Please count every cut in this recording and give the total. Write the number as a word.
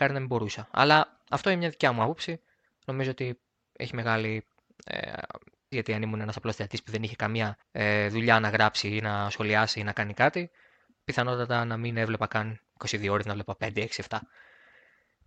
two